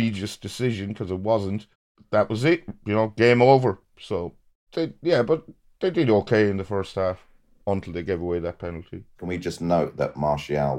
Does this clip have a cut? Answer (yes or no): no